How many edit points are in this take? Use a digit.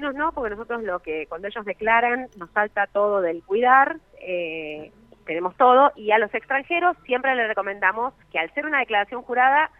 2